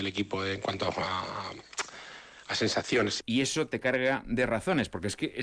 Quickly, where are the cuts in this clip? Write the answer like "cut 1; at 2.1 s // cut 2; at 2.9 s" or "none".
cut 1; at 3.2 s